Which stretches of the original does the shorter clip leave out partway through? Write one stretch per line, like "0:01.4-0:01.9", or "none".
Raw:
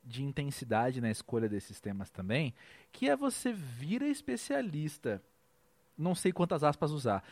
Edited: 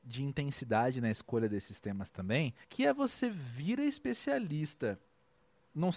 0:02.6-0:02.9